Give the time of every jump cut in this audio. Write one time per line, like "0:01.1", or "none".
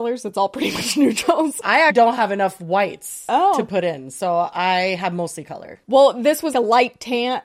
0:01.9
0:06.5